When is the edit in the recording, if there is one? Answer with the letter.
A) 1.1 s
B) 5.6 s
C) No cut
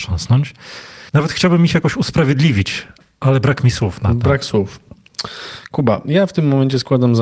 A